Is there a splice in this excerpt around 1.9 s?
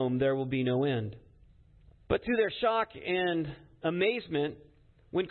yes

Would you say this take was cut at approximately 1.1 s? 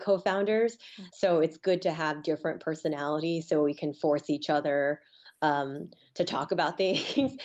yes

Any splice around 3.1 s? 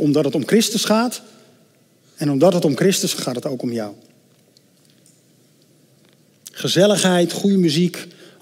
yes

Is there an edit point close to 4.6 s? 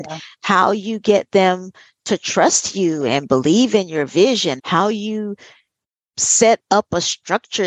yes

